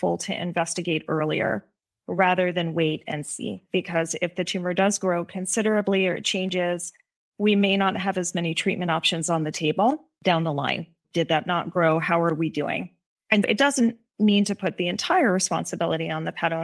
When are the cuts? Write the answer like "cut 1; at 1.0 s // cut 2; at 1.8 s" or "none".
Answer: cut 1; at 11.0 s // cut 2; at 13.4 s